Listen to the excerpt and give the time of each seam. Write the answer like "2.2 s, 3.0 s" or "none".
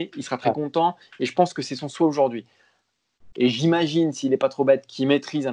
3.3 s